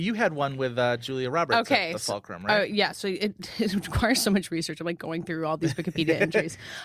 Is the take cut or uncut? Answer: uncut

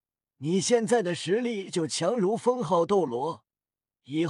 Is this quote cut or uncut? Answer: uncut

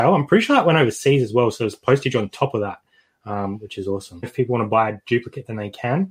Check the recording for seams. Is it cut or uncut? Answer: cut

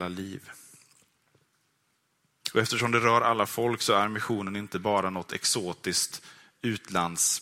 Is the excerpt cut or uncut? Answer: uncut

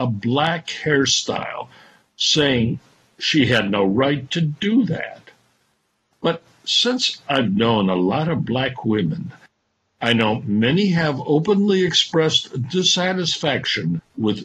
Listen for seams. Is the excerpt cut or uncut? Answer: cut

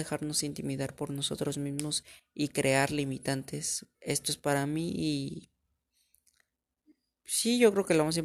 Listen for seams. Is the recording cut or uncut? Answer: cut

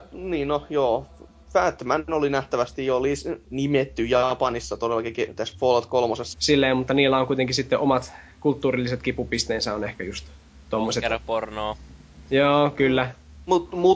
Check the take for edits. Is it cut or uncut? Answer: cut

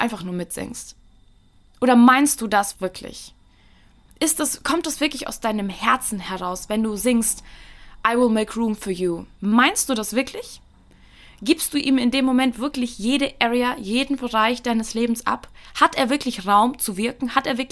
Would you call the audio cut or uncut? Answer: cut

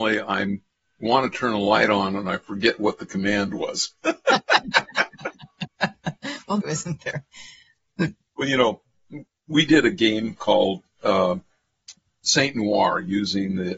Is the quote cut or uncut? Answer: cut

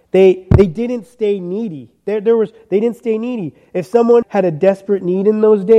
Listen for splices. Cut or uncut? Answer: cut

